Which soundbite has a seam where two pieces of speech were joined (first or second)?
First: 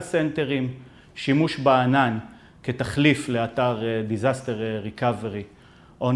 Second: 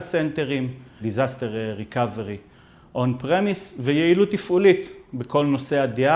second